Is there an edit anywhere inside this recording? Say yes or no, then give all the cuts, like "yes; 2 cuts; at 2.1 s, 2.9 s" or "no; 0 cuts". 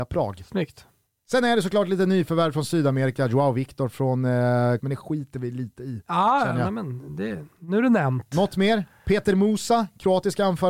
yes; 1 cut; at 4.8 s